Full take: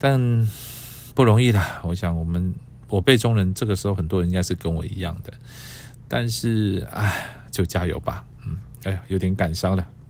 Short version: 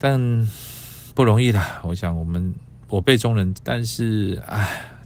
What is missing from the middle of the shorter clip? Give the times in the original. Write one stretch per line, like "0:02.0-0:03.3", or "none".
0:03.5-0:06.0